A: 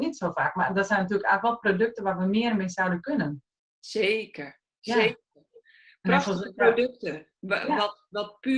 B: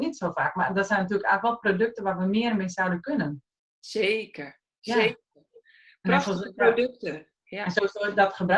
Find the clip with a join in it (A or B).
B